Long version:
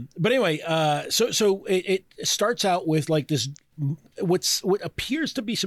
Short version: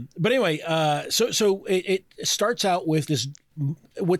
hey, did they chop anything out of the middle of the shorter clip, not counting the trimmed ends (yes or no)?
yes